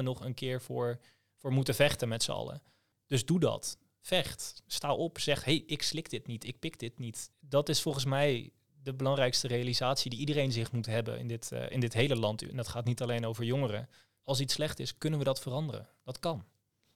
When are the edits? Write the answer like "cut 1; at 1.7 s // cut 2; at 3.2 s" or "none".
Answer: cut 1; at 7.3 s